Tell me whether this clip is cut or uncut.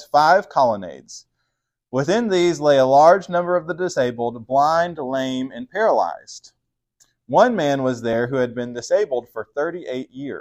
uncut